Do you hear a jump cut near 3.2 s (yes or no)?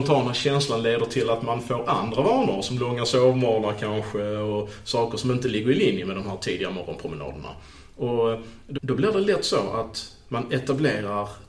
no